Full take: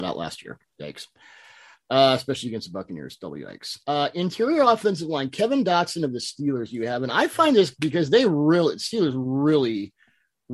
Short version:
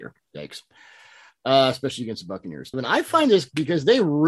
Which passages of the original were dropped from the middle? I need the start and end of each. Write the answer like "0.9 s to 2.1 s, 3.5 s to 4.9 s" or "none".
3.2 s to 7.0 s